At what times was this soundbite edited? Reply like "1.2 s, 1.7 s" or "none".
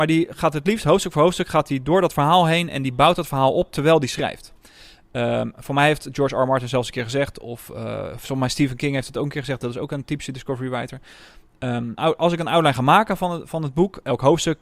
12.0 s